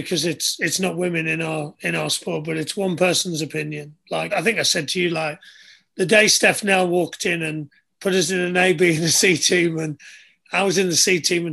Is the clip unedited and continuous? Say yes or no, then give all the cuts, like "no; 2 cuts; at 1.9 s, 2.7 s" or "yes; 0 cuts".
no; 1 cut; at 4.3 s